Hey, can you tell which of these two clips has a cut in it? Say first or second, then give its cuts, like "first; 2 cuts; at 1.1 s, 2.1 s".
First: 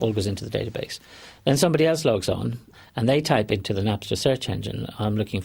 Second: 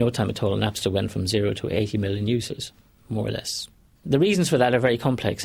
second; 1 cut; at 4.0 s